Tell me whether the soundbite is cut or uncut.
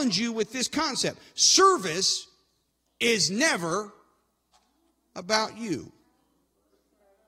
cut